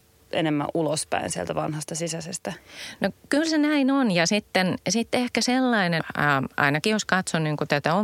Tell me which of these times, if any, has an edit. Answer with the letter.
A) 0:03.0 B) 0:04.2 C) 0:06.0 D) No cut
C